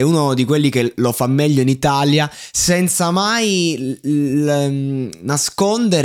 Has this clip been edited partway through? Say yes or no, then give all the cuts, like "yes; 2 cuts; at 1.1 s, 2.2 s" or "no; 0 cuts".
no; 0 cuts